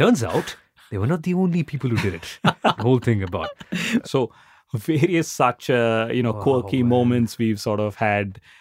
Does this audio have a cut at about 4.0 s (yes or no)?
yes